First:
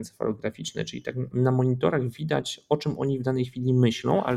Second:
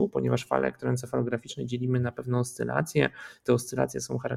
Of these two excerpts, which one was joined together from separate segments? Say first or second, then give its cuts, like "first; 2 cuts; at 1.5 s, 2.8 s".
first; 1 cut; at 1.3 s